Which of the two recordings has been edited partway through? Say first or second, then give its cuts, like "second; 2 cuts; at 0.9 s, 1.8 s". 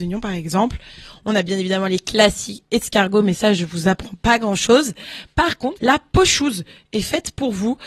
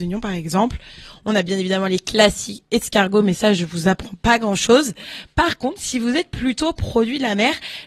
first; 1 cut; at 5.8 s